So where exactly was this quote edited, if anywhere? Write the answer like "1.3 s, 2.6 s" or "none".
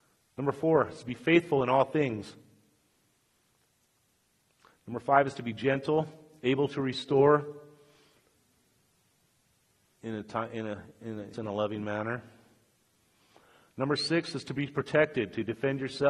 11.3 s